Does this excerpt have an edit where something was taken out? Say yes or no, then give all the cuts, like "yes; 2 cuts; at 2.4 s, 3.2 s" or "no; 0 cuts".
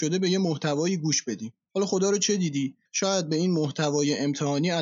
no; 0 cuts